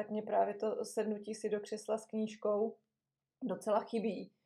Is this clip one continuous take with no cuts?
yes; 0 cuts

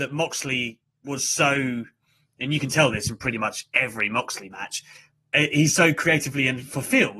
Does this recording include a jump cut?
no; 0 cuts

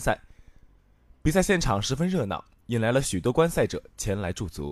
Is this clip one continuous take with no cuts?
yes; 0 cuts

